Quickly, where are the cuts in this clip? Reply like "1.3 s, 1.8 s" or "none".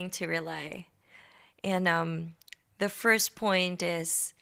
none